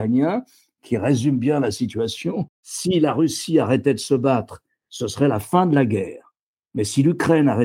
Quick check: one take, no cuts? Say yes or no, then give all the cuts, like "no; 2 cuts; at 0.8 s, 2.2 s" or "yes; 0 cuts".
yes; 0 cuts